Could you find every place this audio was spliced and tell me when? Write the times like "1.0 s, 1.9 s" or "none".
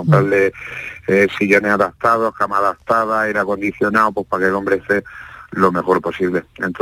none